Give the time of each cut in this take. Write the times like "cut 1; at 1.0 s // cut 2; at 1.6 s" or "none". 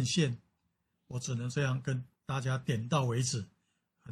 cut 1; at 0.9 s // cut 2; at 2.2 s